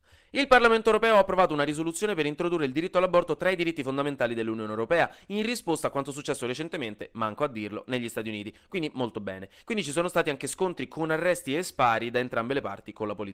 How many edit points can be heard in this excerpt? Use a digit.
1